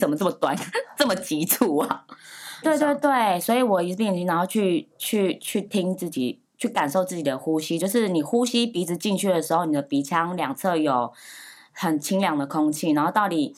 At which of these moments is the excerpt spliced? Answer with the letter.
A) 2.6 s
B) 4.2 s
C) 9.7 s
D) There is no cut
A